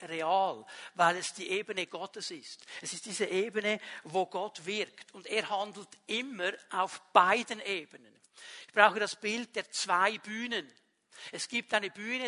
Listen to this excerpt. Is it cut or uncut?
uncut